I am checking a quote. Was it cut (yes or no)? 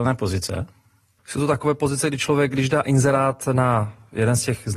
yes